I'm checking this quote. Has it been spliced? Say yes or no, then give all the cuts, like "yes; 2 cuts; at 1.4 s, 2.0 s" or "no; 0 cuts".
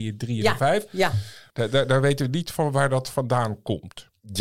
yes; 1 cut; at 1.5 s